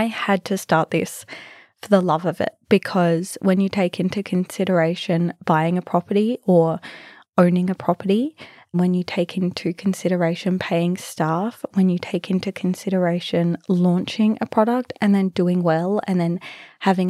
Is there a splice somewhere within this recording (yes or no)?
no